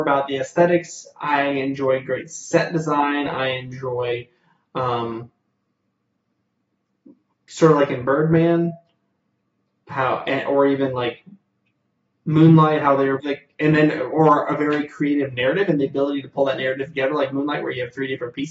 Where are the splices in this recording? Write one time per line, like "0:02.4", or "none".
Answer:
0:07.3
0:13.2